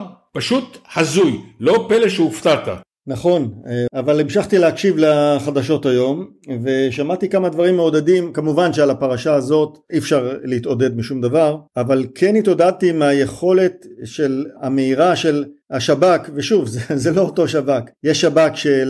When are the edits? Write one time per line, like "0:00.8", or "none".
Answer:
0:03.9